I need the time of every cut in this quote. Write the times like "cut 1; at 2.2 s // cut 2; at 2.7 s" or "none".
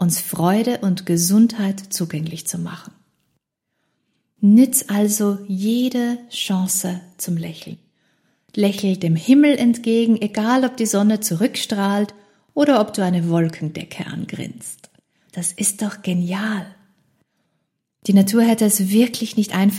cut 1; at 15.3 s